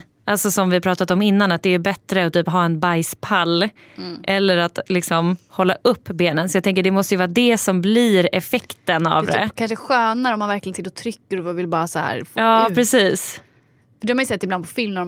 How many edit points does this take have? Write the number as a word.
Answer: zero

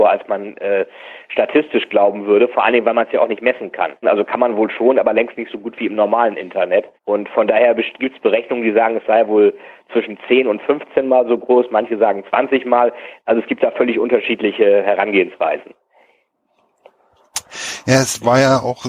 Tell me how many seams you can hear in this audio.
two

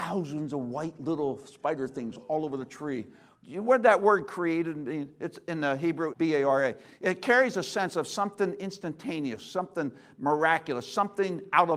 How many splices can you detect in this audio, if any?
two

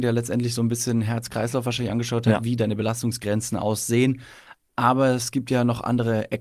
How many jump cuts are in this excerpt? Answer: zero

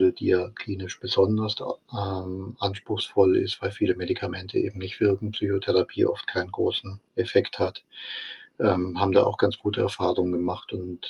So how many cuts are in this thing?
one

